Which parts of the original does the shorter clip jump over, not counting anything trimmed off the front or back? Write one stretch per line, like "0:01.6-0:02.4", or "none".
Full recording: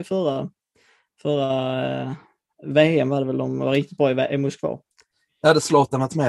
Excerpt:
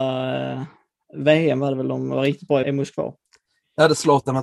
0:04.1-0:04.3